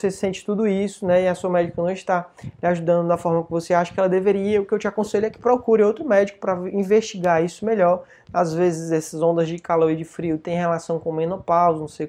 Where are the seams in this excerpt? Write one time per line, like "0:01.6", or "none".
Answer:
none